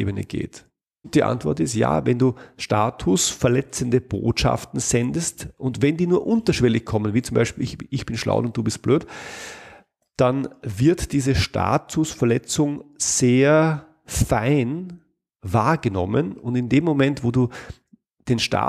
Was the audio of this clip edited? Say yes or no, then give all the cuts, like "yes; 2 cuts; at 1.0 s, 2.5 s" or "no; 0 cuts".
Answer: yes; 1 cut; at 1.0 s